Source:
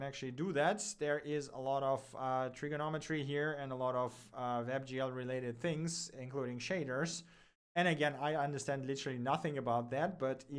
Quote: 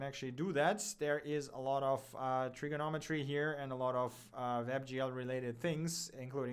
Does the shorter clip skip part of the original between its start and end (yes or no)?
no